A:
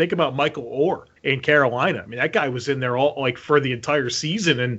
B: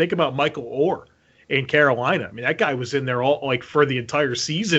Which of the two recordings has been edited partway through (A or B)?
A